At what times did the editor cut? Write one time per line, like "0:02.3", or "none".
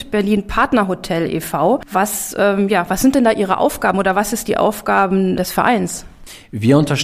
0:05.4